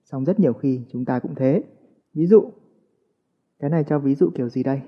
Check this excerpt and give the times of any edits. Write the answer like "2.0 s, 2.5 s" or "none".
2.0 s